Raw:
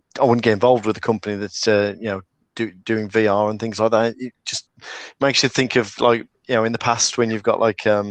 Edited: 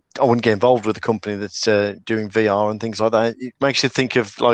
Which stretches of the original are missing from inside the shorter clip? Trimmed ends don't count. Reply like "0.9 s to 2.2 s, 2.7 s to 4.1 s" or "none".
2.0 s to 2.8 s, 4.4 s to 5.2 s